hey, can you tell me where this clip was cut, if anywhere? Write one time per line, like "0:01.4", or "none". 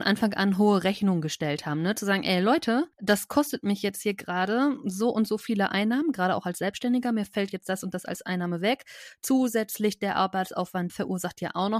0:02.9
0:10.9